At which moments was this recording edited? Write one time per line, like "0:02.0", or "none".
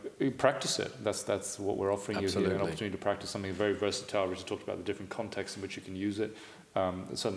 none

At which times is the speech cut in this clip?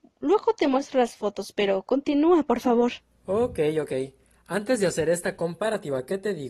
none

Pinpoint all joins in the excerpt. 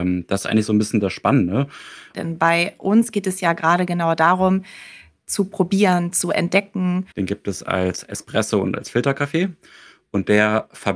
0:02.1
0:07.1

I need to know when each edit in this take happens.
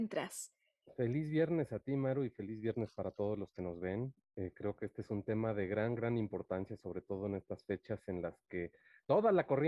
none

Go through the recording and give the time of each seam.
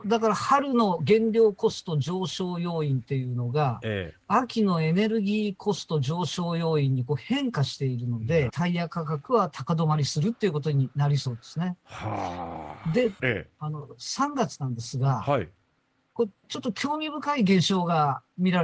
0:08.5
0:13.2

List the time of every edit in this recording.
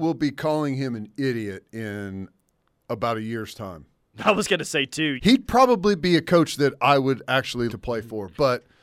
0:05.2
0:07.7

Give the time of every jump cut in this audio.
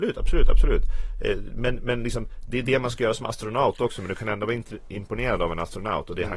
none

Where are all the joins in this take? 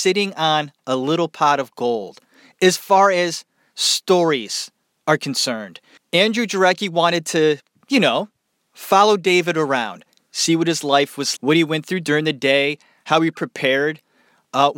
0:06.0
0:11.4

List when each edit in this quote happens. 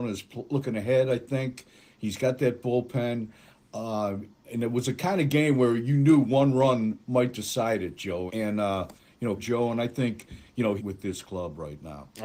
0:08.3
0:09.4
0:10.8

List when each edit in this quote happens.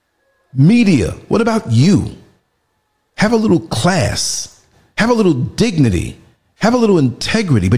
none

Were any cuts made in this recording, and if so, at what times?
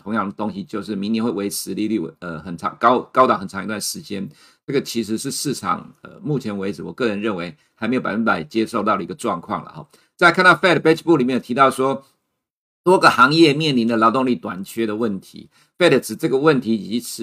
none

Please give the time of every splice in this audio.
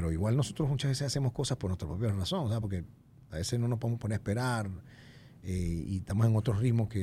none

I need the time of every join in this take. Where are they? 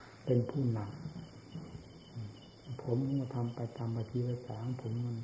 none

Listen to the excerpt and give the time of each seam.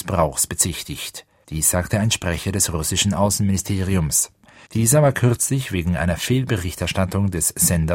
0:01.4
0:04.7

